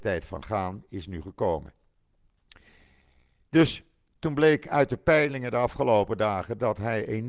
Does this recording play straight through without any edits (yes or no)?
yes